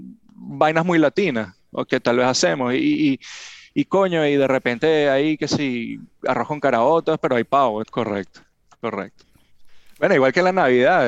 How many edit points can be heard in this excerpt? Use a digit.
2